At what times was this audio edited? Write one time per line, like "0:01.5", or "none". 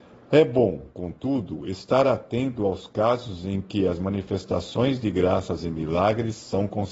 none